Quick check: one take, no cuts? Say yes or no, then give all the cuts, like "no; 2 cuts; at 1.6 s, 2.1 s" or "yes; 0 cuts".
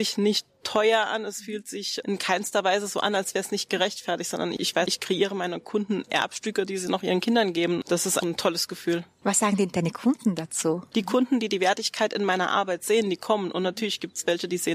no; 3 cuts; at 4.9 s, 8.2 s, 10.9 s